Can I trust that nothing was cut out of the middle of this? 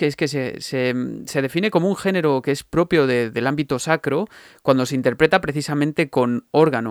yes; 0 cuts

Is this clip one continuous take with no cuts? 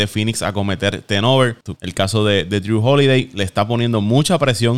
no; 1 cut; at 1.7 s

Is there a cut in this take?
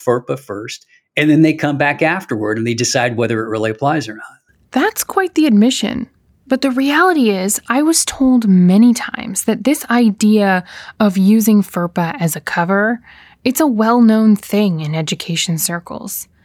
no; 0 cuts

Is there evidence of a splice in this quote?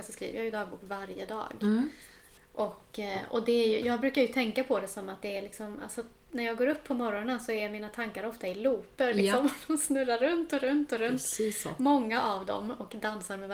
no; 0 cuts

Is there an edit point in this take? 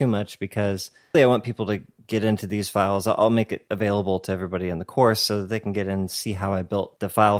yes; 1 cut; at 1.1 s

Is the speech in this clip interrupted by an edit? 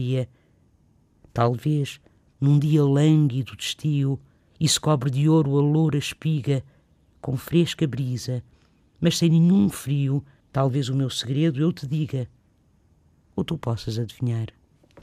yes; 2 cuts; at 4.5 s, 10.4 s

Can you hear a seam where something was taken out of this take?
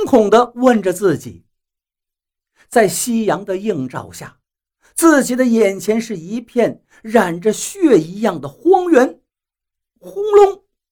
no; 0 cuts

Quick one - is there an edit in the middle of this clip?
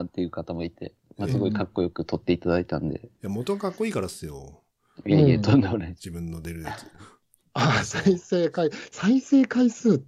yes; 2 cuts; at 6.0 s, 8.9 s

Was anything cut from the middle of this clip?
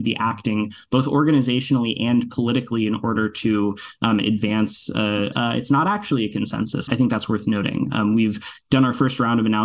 yes; 2 cuts; at 5.3 s, 6.9 s

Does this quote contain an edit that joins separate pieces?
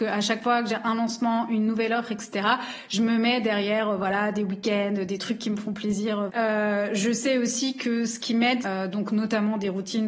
yes; 2 cuts; at 6.3 s, 8.6 s

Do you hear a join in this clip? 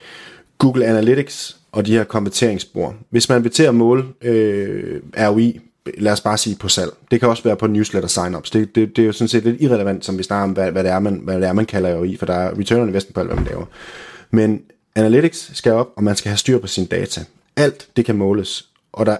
no; 0 cuts

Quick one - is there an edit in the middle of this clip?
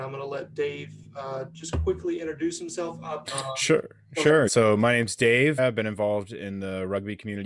yes; 3 cuts; at 3.3 s, 4.5 s, 5.6 s

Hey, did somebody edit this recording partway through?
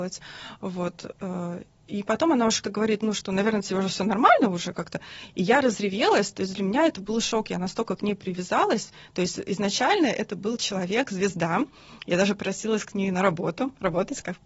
yes; 1 cut; at 2.6 s

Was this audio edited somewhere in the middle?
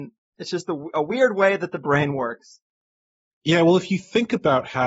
no; 0 cuts

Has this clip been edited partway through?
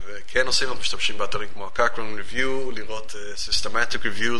no; 0 cuts

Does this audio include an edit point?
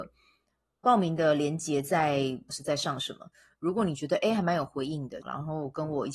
yes; 2 cuts; at 2.5 s, 5.2 s

